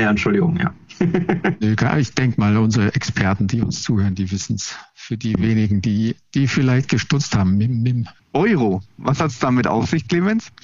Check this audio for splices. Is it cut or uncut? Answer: cut